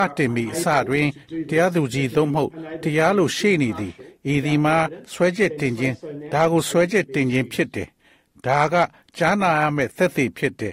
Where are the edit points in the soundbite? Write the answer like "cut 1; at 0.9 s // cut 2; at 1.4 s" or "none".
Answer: none